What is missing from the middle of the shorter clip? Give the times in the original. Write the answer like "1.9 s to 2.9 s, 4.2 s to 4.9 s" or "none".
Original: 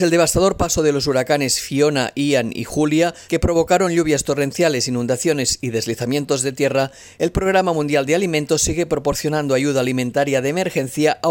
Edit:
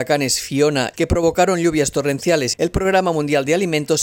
2.1 s to 3.3 s, 4.9 s to 7.1 s